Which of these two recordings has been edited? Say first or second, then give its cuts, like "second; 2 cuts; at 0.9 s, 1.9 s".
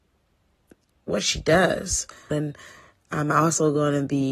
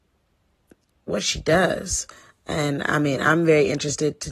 first; 1 cut; at 2.3 s